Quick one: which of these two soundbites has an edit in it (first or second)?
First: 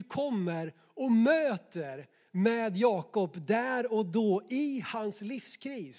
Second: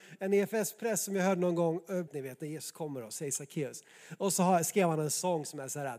second